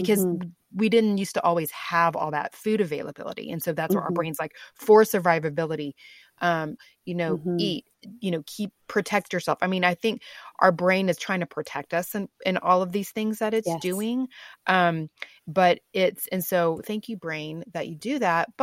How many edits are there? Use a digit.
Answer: 1